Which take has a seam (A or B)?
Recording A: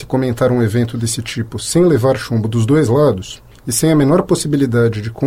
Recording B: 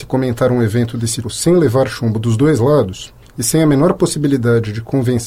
B